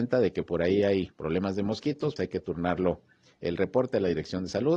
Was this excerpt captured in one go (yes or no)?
no